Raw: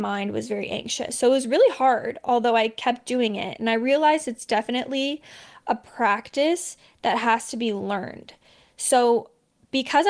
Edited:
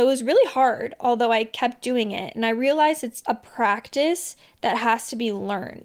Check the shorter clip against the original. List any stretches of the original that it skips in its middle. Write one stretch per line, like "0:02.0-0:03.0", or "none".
0:04.5-0:05.6